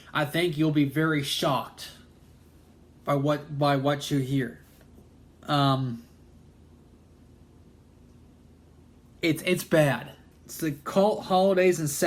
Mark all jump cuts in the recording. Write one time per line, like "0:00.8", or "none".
0:05.3
0:10.3